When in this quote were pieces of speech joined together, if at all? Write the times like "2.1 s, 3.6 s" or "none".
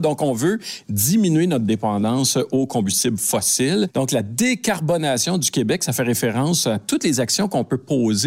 none